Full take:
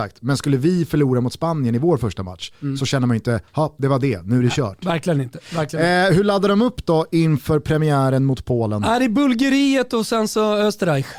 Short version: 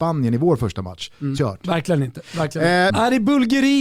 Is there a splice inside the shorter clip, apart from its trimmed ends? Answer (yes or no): yes